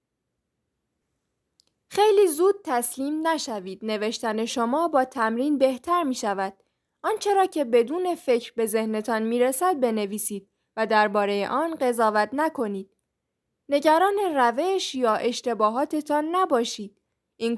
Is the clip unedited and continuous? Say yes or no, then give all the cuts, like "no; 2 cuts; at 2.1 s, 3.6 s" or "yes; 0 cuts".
yes; 0 cuts